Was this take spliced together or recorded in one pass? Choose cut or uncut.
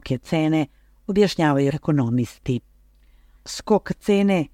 cut